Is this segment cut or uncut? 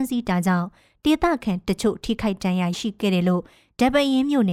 cut